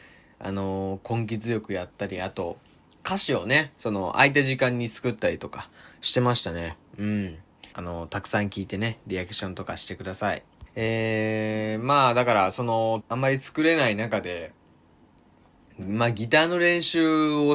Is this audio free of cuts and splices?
no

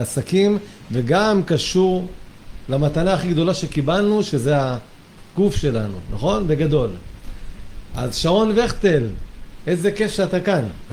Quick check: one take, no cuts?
yes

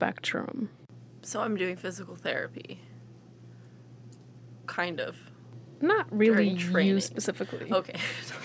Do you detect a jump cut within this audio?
no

